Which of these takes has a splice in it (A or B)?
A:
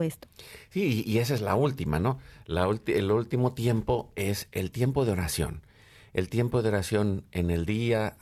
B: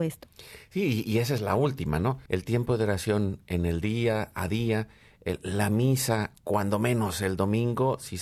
B